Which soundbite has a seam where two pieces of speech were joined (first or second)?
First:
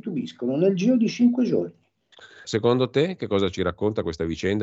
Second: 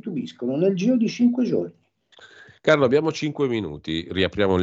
first